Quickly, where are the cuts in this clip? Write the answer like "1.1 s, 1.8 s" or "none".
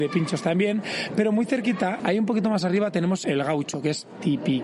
2.0 s, 3.2 s

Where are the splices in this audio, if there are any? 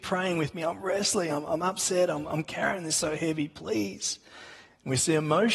none

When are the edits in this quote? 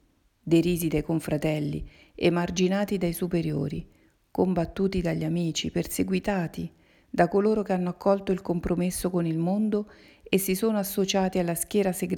none

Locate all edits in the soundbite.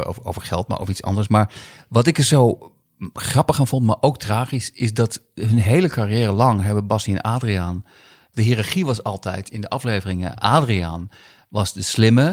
8.3 s

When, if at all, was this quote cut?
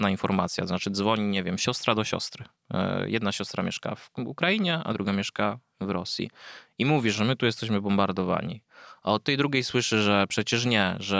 none

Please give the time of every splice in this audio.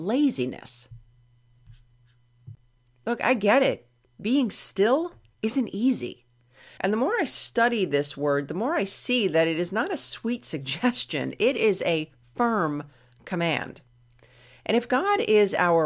6.8 s

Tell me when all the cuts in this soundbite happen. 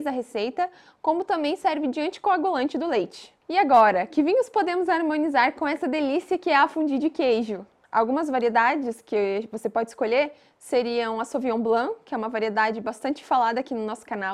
7.9 s

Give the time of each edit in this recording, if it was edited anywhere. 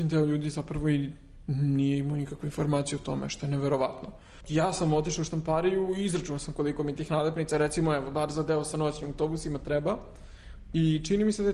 4.4 s

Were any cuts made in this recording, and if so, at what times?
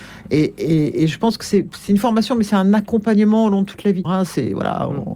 4.0 s

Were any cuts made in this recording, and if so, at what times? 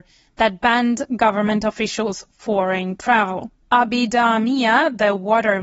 3.7 s

